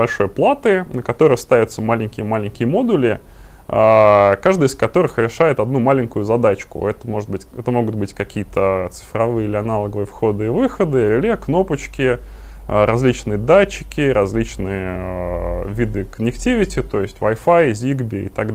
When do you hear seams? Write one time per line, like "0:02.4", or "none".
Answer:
none